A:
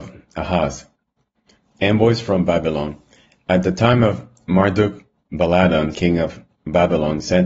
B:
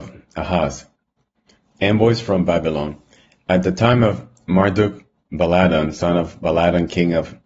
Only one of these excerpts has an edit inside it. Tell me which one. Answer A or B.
A